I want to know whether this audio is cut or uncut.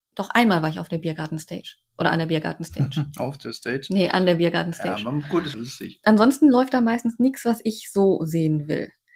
cut